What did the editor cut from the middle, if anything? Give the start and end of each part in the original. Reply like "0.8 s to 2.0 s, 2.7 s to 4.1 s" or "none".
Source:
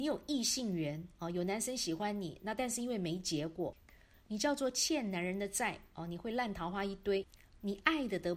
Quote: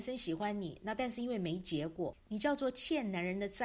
3.8 s to 4.2 s